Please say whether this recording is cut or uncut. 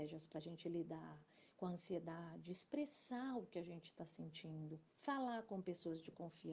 cut